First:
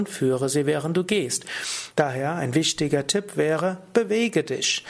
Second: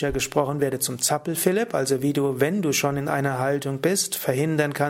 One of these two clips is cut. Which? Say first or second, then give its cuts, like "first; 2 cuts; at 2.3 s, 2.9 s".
first; 1 cut; at 1.9 s